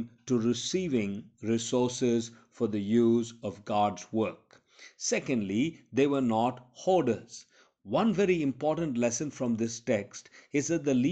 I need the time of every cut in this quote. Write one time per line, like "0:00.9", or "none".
none